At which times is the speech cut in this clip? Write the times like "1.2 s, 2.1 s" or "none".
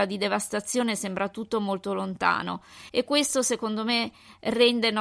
2.9 s